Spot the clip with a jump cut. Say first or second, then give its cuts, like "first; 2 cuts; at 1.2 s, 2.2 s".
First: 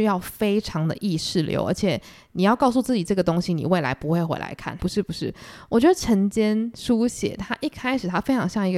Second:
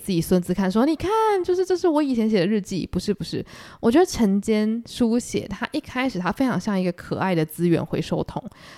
first; 1 cut; at 4.8 s